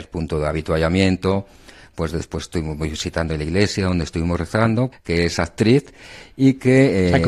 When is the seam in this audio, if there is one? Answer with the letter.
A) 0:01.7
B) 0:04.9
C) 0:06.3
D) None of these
B